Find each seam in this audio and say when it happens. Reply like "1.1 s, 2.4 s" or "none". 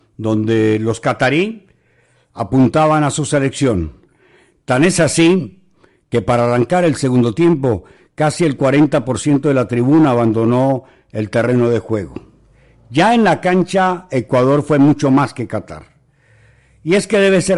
none